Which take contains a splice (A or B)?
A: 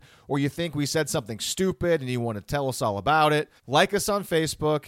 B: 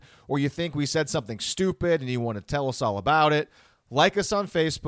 A